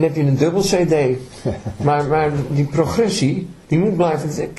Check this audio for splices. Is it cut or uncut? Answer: cut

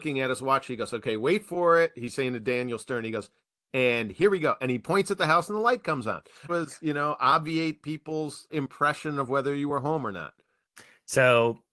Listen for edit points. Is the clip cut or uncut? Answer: cut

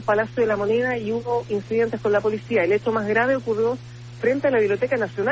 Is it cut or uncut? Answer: uncut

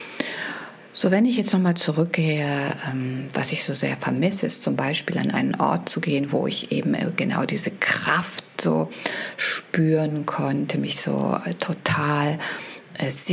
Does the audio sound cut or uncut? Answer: uncut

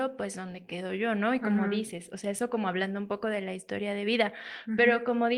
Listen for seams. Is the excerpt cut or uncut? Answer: uncut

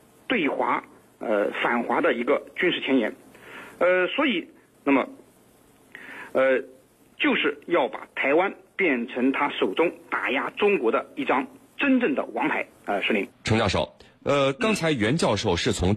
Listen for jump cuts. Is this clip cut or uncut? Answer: cut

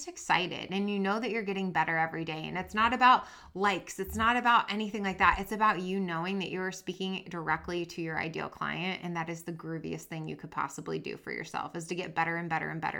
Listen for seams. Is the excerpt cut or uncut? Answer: uncut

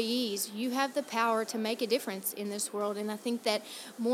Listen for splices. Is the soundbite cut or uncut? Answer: uncut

